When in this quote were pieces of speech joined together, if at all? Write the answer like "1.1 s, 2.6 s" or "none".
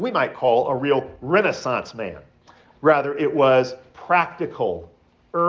2.7 s